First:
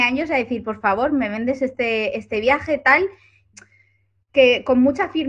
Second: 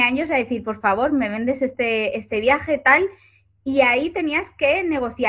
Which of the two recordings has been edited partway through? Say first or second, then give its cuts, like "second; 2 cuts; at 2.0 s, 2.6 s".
first; 1 cut; at 3.5 s